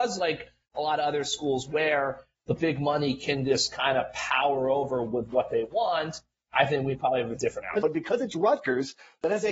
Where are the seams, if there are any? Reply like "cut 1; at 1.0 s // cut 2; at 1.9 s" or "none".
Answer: cut 1; at 7.8 s